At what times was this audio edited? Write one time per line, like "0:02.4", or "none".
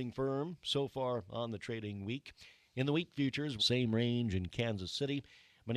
0:03.6